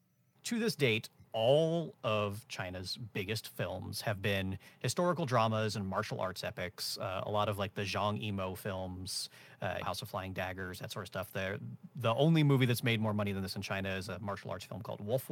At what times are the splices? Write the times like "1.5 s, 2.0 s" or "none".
9.8 s